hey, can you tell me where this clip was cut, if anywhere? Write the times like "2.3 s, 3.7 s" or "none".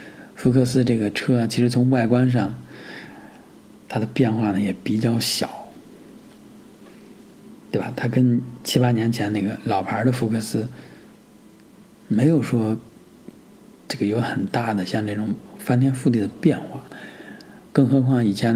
none